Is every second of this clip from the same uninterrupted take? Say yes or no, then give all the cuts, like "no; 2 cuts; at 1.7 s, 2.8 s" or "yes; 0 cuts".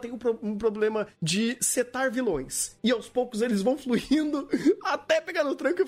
yes; 0 cuts